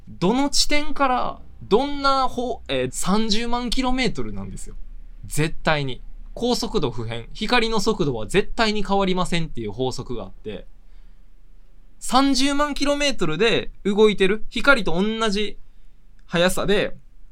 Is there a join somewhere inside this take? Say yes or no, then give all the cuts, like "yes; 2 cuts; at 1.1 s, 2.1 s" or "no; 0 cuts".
yes; 1 cut; at 2.9 s